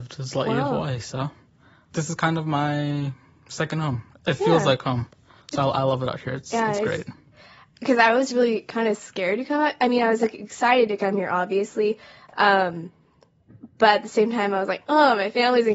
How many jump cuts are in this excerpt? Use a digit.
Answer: 0